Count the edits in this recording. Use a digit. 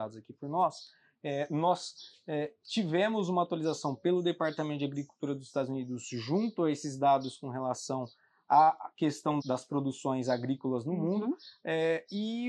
1